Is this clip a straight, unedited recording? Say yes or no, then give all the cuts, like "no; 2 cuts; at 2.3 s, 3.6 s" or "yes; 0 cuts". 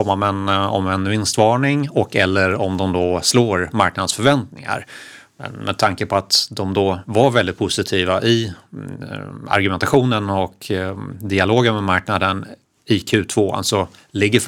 yes; 0 cuts